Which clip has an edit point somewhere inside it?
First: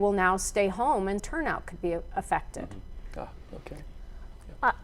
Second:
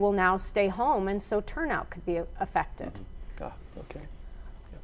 first; 1 cut; at 1.2 s

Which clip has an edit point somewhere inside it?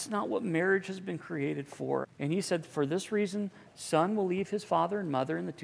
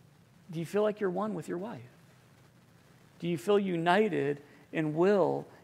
first; 2 cuts; at 2.0 s, 3.7 s

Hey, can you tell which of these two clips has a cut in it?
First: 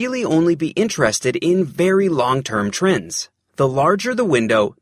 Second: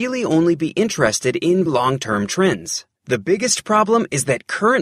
second; 2 cuts; at 1.7 s, 2.9 s

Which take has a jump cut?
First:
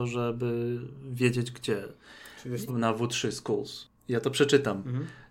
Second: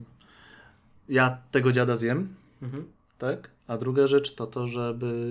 first; 1 cut; at 2.7 s

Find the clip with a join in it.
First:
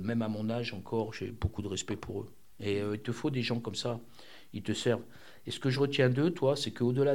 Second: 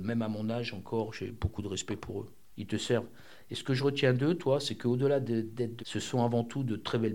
second; 2 cuts; at 2.5 s, 5.8 s

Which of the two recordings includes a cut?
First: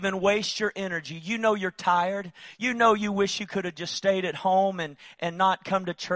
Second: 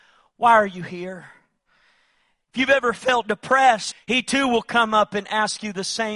second; 1 cut; at 3.9 s

